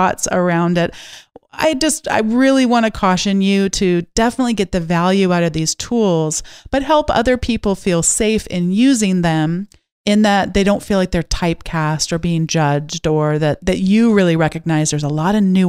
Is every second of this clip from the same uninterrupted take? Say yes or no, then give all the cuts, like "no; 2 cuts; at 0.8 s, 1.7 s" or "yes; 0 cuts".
yes; 0 cuts